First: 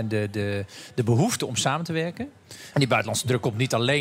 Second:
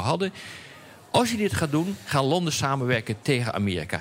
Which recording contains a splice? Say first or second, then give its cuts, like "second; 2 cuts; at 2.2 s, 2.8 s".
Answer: first; 1 cut; at 2.7 s